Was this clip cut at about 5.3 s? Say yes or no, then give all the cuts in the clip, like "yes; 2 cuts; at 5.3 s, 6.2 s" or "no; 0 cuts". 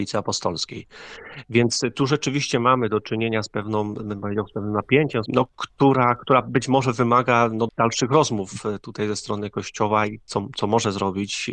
yes; 2 cuts; at 5.3 s, 7.7 s